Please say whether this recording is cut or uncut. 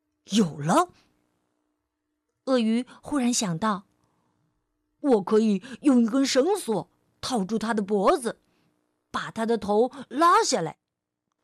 uncut